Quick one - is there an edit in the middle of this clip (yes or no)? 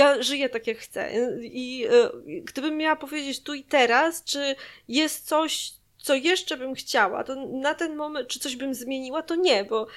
no